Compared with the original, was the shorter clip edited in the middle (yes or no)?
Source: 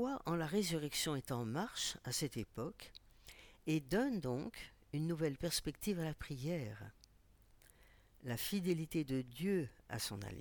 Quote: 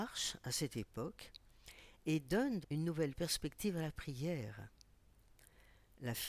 yes